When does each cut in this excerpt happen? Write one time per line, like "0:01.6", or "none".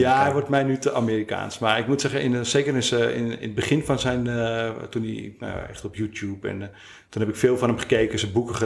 none